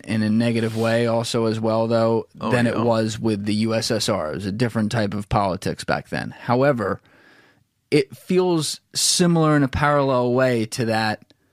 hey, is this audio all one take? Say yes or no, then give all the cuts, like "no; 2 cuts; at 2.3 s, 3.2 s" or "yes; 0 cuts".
yes; 0 cuts